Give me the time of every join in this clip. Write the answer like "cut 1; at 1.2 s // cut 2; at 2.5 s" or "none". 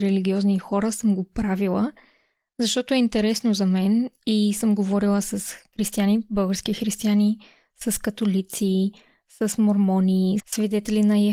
cut 1; at 10.4 s